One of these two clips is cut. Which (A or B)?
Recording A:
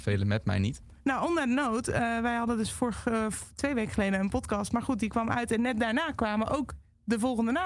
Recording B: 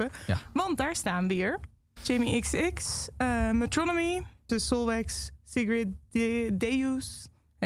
B